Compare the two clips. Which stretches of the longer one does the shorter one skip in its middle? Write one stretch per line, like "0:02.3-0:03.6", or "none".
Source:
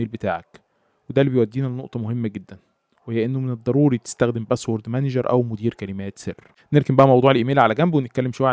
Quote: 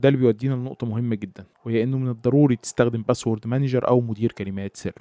0:02.7-0:03.0